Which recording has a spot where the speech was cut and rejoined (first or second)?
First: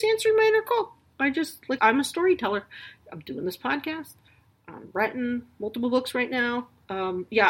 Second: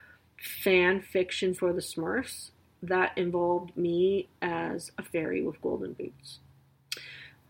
first